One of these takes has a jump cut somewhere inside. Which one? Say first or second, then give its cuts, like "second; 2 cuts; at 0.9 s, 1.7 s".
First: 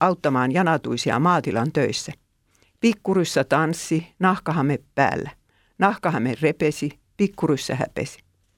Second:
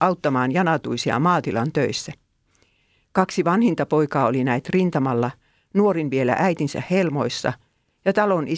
first; 1 cut; at 2.6 s